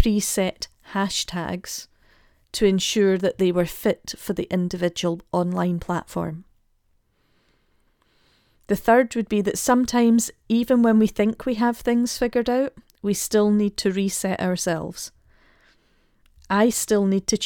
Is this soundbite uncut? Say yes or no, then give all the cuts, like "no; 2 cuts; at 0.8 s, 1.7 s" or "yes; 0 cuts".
yes; 0 cuts